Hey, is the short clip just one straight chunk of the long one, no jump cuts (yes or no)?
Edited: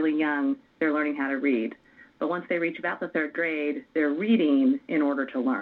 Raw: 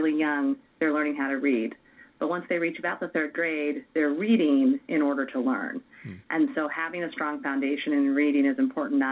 yes